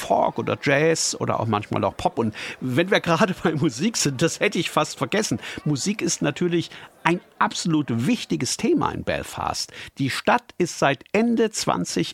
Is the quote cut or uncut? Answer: uncut